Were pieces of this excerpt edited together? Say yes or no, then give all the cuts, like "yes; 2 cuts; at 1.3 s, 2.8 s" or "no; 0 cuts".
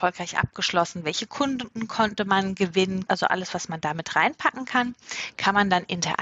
yes; 1 cut; at 3.1 s